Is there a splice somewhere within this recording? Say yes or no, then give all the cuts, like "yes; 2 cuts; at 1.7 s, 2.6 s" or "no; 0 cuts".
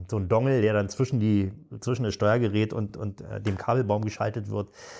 no; 0 cuts